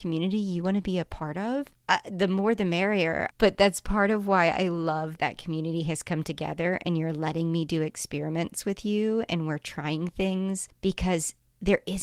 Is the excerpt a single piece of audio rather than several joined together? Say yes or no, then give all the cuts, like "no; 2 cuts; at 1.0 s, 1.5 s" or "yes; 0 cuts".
no; 2 cuts; at 3.3 s, 5.2 s